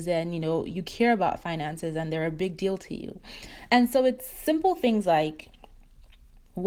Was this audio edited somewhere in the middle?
no; 0 cuts

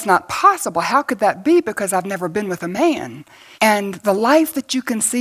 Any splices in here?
yes; 1 cut; at 3.5 s

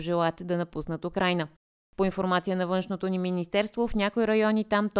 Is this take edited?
no; 0 cuts

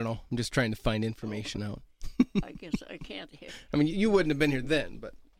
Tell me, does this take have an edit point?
no; 0 cuts

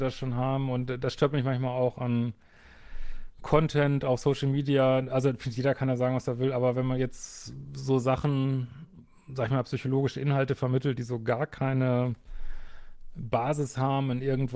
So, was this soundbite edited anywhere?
no; 0 cuts

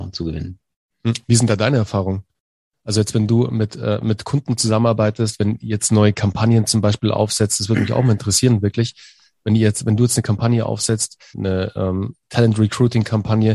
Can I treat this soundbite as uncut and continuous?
no; 1 cut; at 11.3 s

